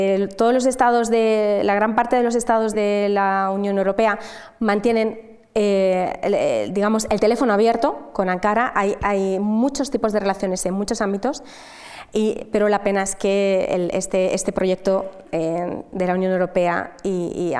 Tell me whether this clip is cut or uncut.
cut